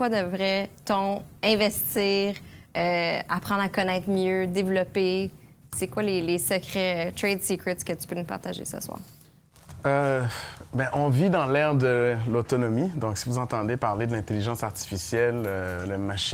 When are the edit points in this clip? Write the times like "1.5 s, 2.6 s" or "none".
none